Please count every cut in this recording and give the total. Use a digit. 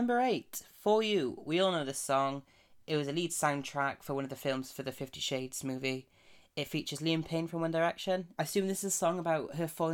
1